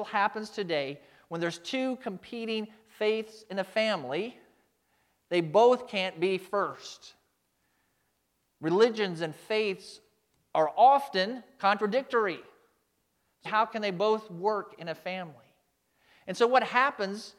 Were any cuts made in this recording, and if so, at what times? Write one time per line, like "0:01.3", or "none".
0:13.4